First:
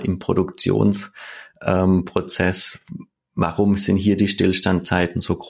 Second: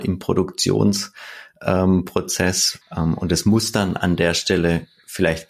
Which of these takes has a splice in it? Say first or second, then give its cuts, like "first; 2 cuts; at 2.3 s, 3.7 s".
second; 1 cut; at 2.8 s